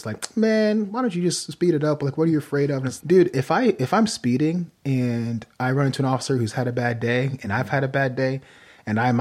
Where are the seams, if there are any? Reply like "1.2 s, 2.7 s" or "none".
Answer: 3.0 s, 5.5 s